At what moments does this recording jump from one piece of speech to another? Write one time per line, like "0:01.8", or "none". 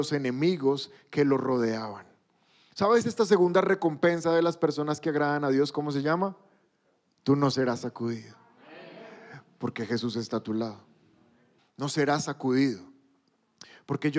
0:07.2
0:11.6